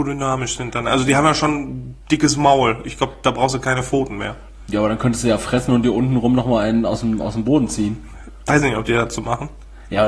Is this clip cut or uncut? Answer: cut